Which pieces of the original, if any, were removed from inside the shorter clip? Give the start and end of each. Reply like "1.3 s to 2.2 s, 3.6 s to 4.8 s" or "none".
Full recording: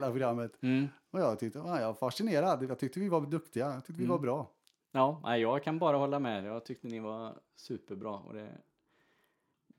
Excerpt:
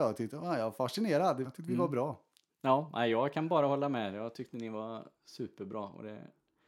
2.7 s to 3.8 s